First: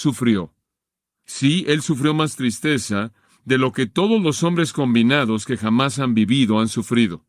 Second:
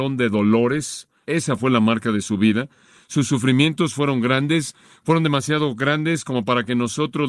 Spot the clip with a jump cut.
second; 1 cut; at 1.2 s

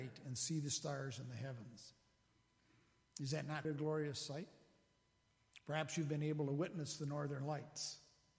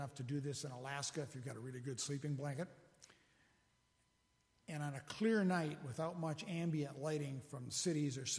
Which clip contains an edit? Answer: first; 1 cut; at 3.6 s

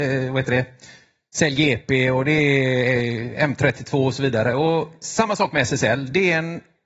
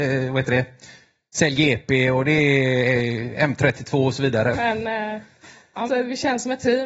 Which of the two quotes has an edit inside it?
second; 2 cuts; at 4.5 s, 5.9 s

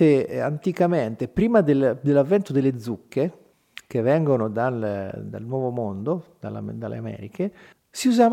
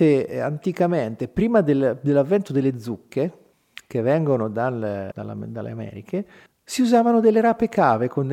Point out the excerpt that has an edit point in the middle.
second; 1 cut; at 5.1 s

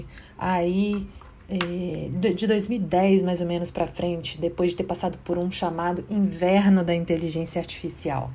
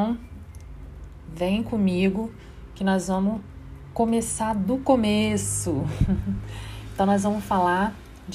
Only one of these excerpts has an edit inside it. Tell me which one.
first; 1 cut; at 1.4 s

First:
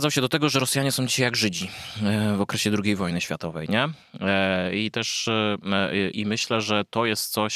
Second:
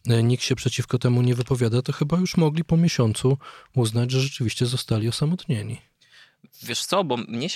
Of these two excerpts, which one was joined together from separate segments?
first; 1 cut; at 6.1 s

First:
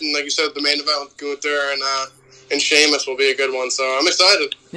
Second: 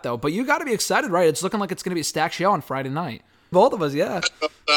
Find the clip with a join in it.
second; 1 cut; at 3.5 s

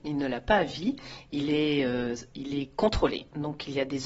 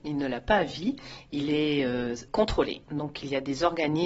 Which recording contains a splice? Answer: second; 1 cut; at 2.3 s

